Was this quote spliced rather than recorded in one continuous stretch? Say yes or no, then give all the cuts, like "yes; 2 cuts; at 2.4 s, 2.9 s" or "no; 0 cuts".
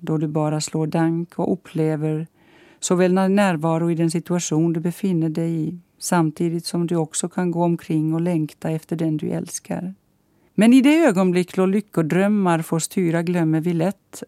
yes; 1 cut; at 10.5 s